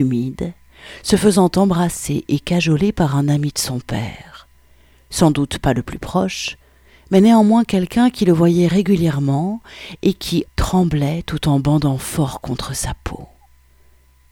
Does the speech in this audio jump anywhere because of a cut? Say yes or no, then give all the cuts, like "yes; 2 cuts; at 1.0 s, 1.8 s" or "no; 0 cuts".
yes; 1 cut; at 10.5 s